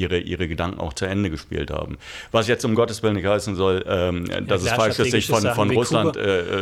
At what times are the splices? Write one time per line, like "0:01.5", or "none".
none